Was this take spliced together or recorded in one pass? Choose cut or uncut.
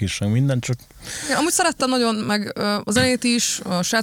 uncut